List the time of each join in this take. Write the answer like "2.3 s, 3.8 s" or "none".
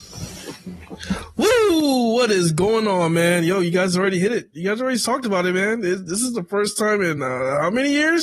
none